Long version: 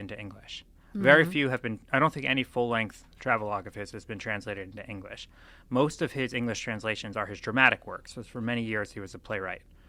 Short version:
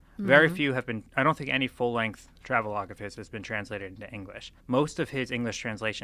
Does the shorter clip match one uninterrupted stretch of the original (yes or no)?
no